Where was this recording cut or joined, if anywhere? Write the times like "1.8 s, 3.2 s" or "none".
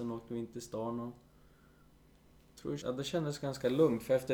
2.8 s